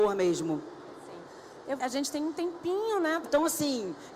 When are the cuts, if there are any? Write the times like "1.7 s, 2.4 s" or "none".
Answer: 1.8 s, 3.2 s